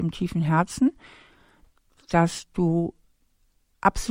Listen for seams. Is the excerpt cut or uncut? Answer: uncut